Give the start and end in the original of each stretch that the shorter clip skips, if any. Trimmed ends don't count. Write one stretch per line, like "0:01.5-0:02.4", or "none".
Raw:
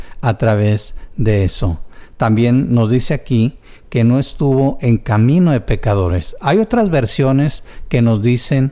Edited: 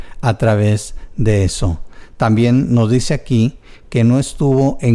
none